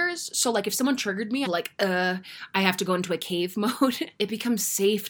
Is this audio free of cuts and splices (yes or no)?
no